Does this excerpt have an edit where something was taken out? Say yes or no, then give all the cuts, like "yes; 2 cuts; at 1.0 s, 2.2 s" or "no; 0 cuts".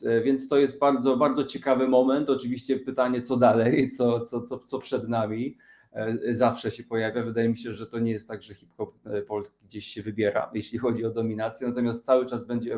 no; 0 cuts